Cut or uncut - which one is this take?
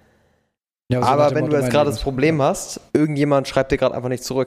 cut